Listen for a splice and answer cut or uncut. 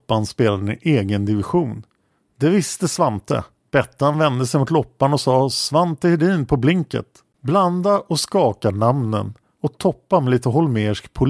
cut